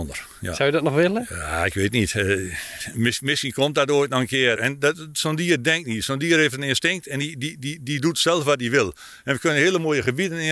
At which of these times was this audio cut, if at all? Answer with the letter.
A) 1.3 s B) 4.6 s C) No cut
B